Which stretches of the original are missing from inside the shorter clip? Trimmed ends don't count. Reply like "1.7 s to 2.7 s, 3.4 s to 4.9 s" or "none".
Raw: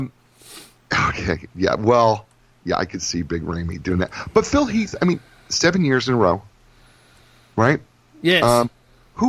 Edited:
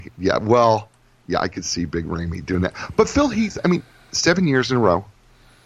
none